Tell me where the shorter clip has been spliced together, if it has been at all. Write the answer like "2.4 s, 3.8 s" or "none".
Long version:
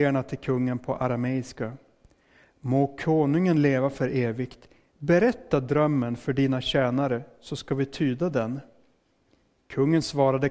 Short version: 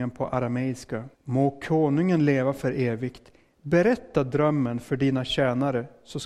1.1 s